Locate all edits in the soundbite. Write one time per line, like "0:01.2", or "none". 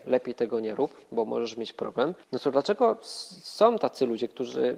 0:02.2